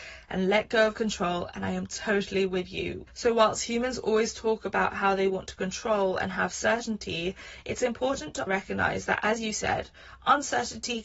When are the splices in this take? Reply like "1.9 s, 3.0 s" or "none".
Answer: 3.1 s, 8.5 s